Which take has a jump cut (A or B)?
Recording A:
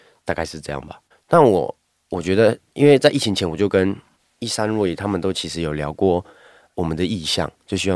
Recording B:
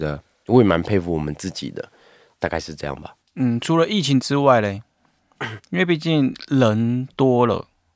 A